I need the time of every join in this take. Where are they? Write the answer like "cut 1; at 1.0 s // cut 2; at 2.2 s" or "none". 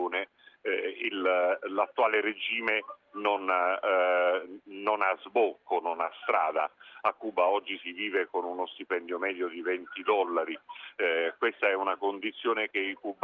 none